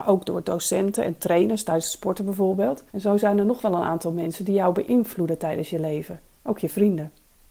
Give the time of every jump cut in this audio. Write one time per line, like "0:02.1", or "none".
0:02.9